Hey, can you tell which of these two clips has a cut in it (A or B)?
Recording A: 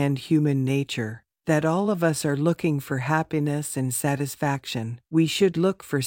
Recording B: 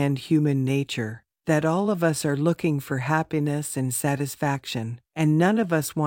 A